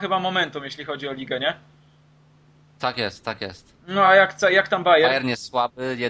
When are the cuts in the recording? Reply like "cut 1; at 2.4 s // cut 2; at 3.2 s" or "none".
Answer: none